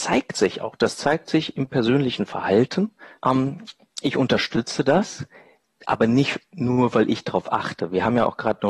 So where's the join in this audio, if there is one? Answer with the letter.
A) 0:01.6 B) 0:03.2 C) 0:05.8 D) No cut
B